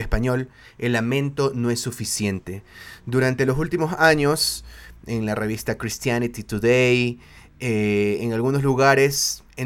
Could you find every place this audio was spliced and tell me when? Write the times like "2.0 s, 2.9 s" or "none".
none